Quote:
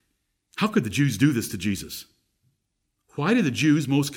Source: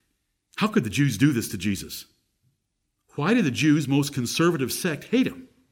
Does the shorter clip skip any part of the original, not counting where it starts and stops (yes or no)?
no